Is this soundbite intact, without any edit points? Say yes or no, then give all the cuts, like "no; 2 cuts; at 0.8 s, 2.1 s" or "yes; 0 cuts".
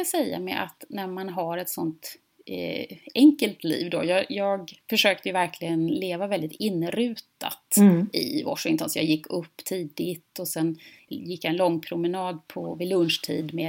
yes; 0 cuts